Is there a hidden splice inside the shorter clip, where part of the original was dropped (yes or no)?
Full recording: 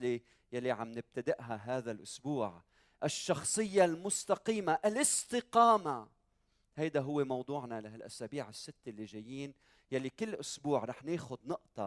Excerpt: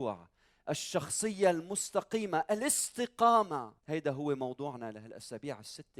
yes